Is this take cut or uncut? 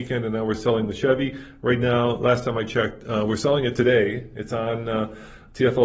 uncut